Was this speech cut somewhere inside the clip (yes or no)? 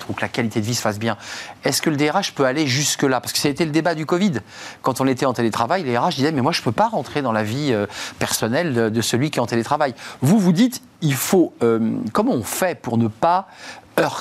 no